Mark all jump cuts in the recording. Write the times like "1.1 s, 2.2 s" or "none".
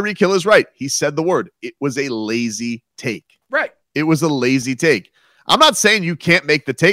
none